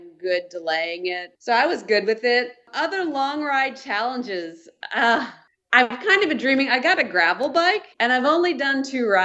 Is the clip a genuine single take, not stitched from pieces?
no; 2 cuts; at 1.4 s, 7.9 s

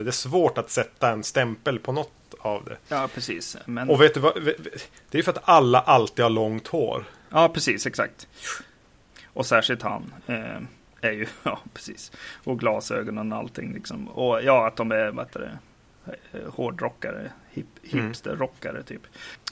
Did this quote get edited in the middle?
no; 0 cuts

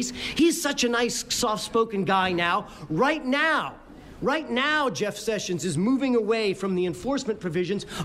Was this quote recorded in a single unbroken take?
yes; 0 cuts

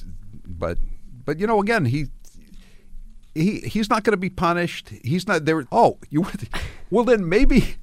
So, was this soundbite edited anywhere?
yes; 2 cuts; at 3.6 s, 5.6 s

